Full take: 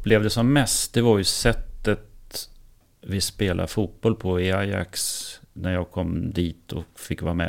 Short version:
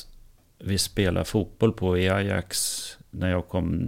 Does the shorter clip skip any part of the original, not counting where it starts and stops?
no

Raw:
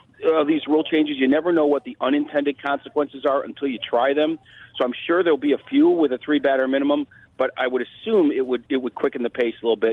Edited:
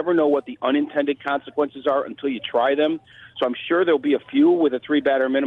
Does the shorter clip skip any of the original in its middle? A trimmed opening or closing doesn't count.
no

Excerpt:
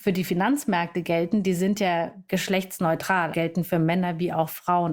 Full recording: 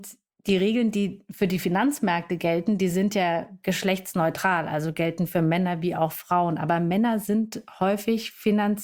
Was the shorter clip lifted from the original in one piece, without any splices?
no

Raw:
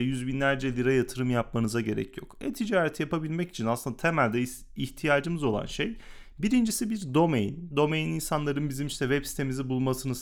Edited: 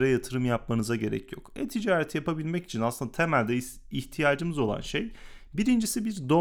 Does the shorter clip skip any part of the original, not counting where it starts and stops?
no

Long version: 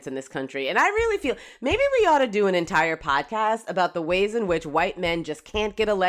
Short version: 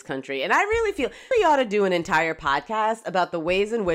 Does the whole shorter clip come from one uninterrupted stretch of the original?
no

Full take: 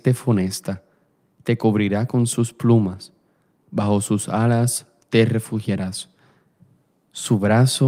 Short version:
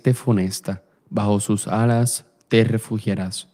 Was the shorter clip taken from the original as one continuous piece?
no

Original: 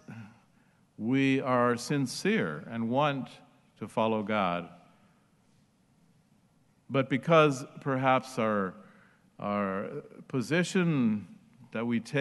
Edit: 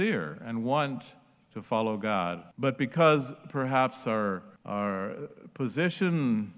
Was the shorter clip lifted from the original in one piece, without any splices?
no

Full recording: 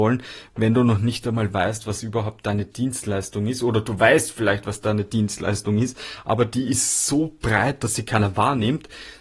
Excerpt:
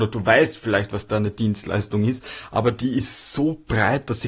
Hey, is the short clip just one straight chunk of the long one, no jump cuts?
yes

